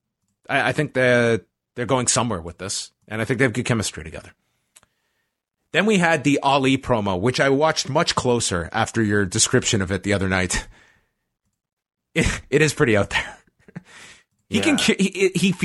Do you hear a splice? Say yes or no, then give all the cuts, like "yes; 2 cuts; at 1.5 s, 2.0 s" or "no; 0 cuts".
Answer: no; 0 cuts